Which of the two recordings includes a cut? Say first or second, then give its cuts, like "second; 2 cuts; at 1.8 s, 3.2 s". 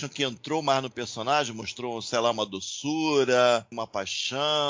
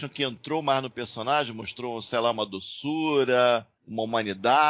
first; 1 cut; at 3.7 s